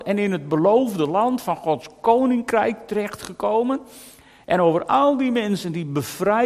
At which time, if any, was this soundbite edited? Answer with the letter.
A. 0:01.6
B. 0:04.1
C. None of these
C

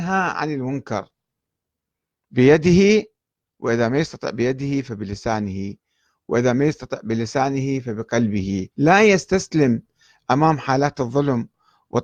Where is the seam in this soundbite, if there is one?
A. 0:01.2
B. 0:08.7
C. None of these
B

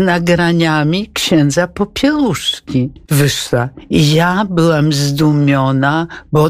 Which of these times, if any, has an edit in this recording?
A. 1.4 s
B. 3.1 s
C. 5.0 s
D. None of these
B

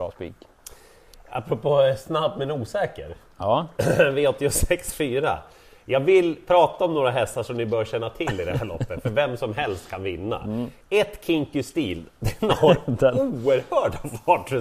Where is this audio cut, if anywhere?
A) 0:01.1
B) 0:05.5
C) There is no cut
C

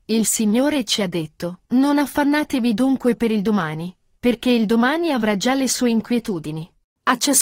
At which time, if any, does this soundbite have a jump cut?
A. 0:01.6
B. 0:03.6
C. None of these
C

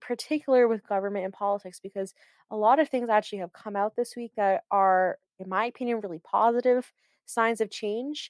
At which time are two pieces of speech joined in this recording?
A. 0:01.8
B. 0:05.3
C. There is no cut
B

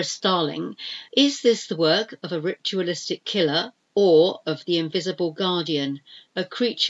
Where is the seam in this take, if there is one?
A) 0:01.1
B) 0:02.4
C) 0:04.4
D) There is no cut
A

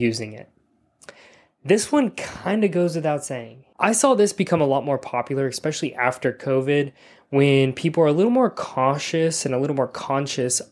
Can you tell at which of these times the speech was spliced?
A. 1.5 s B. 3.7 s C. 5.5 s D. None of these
D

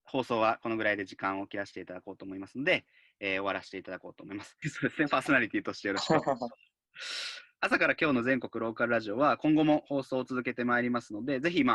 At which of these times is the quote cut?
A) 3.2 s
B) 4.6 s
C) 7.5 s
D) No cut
B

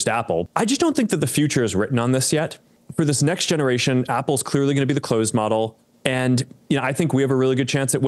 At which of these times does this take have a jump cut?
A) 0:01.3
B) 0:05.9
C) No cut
B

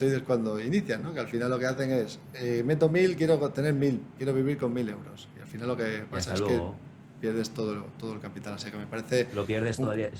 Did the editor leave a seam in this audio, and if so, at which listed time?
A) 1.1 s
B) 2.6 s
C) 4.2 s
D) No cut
C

